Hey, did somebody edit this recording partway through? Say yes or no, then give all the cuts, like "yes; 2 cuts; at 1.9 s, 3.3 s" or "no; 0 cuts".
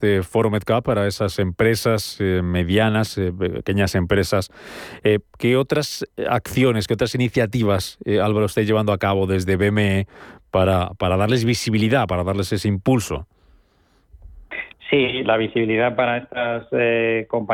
no; 0 cuts